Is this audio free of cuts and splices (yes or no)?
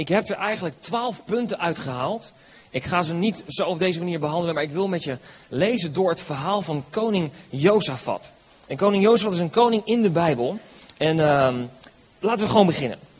yes